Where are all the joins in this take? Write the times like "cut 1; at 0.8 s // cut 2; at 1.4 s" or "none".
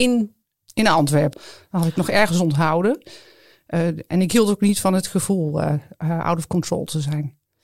cut 1; at 1.3 s